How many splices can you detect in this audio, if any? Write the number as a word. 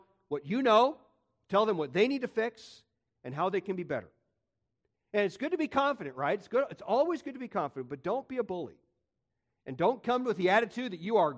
zero